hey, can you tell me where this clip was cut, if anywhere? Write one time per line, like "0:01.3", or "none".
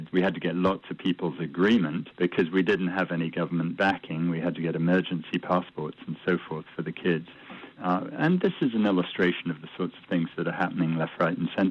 0:07.8

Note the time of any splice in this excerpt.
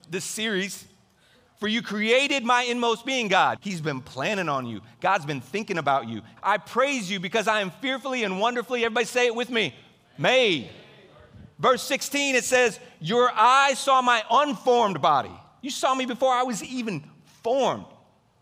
0:03.6
0:06.4

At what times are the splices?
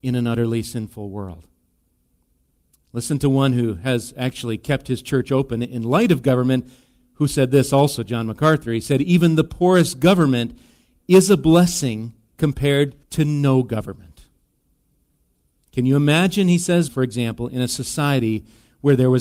0:13.0
0:16.9

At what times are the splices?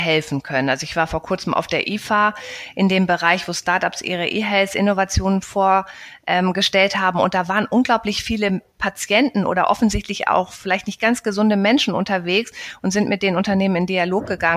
none

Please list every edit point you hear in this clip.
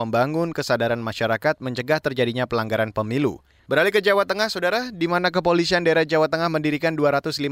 0:03.6

